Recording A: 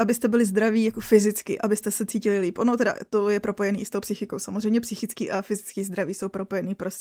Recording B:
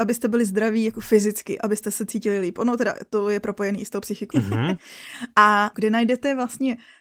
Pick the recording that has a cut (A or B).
B